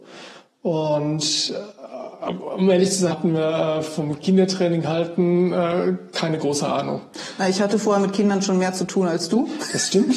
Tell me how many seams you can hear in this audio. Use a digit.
1